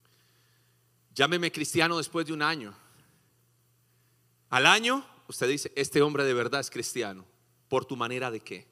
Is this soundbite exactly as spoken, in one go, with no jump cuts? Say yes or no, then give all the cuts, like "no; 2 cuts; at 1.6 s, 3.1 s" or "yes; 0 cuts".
no; 1 cut; at 7.6 s